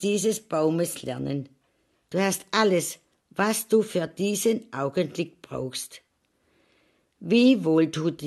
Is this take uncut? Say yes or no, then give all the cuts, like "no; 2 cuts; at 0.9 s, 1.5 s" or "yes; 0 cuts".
no; 1 cut; at 1.9 s